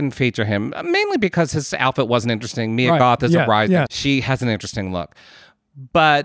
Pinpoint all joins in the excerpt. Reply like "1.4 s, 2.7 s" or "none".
3.9 s